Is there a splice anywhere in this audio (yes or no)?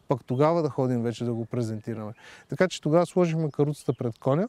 no